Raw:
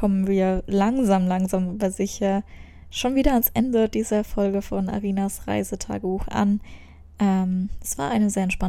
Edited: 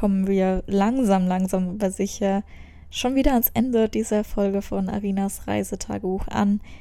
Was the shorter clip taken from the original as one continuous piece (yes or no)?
yes